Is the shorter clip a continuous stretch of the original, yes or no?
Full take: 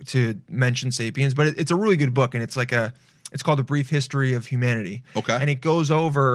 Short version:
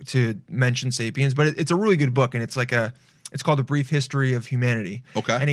yes